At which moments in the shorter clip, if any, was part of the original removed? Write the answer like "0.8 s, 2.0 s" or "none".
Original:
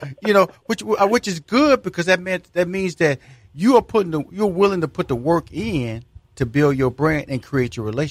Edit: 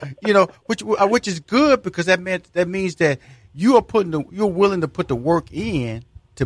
none